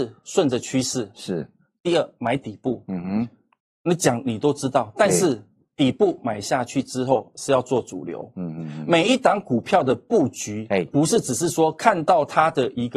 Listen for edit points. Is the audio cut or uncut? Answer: uncut